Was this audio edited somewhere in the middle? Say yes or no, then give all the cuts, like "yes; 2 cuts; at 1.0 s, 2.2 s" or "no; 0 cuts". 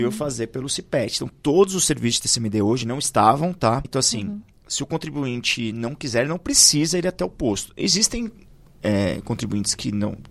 yes; 1 cut; at 3.8 s